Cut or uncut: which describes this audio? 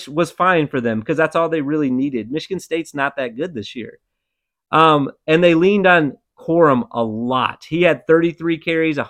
uncut